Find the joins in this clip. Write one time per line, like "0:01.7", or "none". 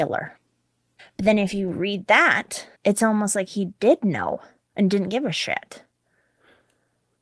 0:01.0
0:02.7